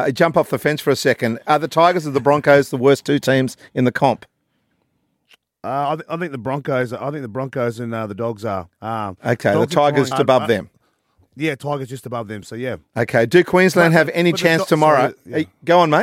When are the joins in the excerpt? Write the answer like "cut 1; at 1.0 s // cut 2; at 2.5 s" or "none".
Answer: cut 1; at 10.1 s